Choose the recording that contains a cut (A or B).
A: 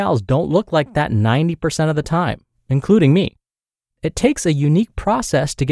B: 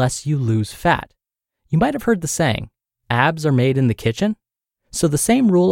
B